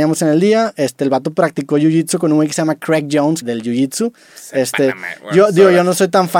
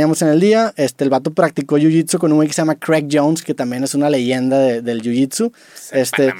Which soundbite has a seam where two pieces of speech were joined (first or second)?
first